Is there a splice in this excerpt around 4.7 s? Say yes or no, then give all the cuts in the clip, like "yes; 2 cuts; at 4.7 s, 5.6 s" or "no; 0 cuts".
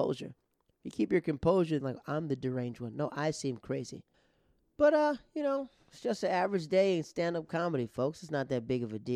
no; 1 cut; at 1.8 s